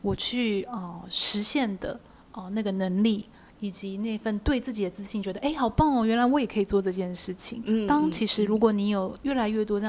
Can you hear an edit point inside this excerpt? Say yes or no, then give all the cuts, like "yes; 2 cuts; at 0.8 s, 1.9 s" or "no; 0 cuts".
no; 0 cuts